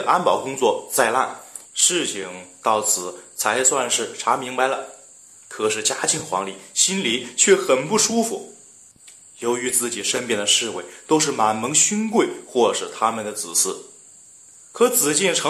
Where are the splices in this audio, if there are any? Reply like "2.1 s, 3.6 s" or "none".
1.6 s